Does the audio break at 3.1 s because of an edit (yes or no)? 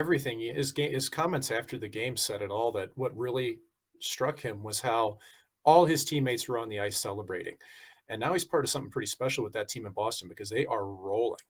no